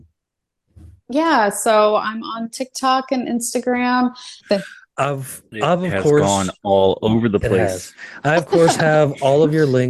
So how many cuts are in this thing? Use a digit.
1